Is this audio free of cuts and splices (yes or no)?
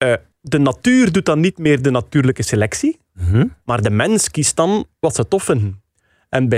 yes